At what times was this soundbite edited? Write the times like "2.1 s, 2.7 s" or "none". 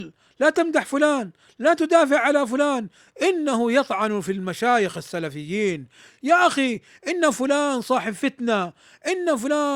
none